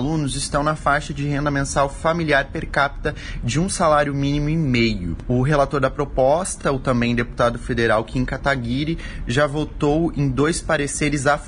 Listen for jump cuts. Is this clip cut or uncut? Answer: uncut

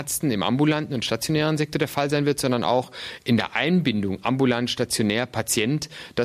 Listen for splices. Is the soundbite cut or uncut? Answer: uncut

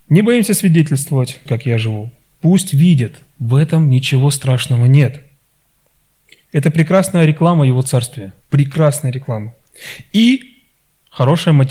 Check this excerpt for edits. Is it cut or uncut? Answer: cut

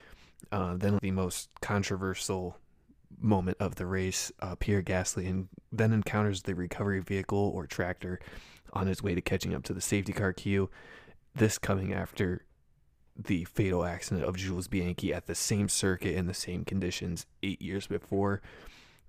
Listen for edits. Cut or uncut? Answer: cut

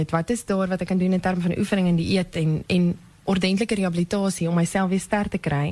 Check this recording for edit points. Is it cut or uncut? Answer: uncut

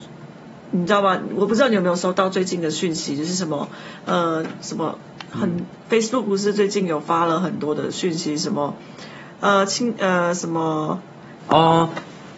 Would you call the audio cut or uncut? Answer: cut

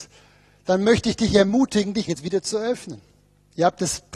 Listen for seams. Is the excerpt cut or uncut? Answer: cut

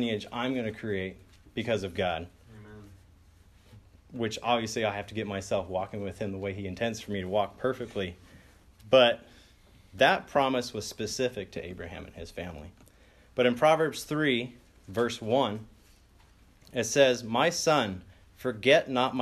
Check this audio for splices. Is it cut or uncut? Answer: uncut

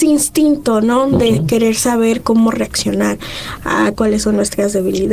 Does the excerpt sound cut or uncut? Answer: cut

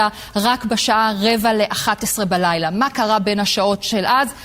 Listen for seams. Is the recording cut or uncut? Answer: uncut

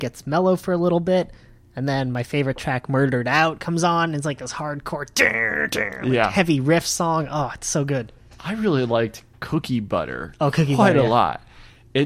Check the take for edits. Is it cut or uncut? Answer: uncut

